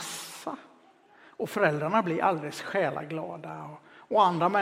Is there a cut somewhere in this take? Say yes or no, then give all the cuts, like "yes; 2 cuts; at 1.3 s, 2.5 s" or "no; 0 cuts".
no; 0 cuts